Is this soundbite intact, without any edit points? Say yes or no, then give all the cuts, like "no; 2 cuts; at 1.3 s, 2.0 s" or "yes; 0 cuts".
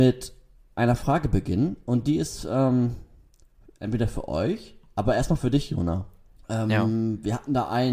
no; 1 cut; at 6.4 s